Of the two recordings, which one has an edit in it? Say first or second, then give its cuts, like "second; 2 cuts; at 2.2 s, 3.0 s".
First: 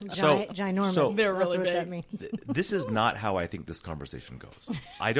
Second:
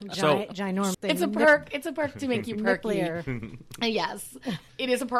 second; 1 cut; at 0.9 s